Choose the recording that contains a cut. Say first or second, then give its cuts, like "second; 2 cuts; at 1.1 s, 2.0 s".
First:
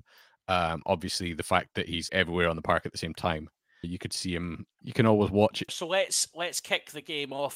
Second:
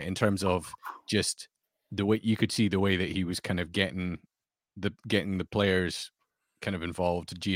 first; 3 cuts; at 2.1 s, 3.8 s, 5.7 s